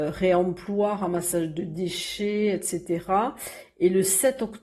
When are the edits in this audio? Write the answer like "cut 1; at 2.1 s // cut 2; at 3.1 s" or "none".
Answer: none